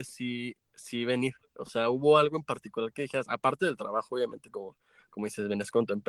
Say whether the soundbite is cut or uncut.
uncut